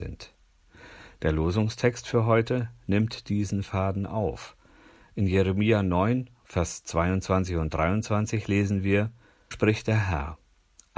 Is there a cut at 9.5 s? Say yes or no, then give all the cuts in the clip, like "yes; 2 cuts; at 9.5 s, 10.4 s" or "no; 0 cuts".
yes; 1 cut; at 9.5 s